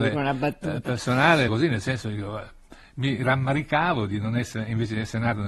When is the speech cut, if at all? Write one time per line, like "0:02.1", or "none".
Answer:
0:01.5